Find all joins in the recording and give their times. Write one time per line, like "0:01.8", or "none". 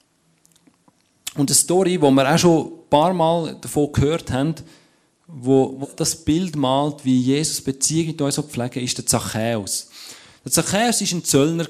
0:05.8